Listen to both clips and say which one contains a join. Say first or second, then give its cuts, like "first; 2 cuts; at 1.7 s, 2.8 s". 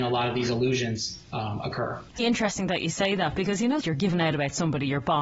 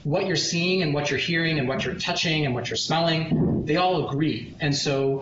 first; 2 cuts; at 2.2 s, 3.8 s